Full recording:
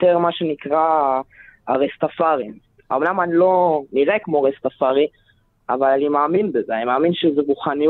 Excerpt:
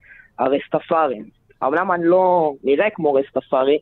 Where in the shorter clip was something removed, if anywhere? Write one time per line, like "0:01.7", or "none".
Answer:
none